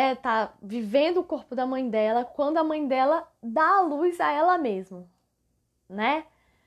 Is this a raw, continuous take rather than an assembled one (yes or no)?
yes